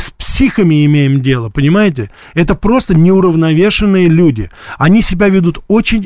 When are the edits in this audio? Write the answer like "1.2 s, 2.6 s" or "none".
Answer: none